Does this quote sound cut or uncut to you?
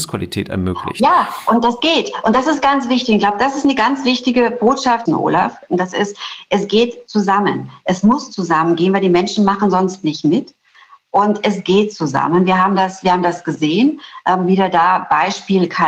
cut